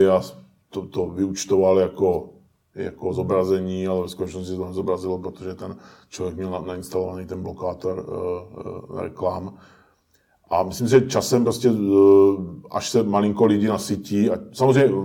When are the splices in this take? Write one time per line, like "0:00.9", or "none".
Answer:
none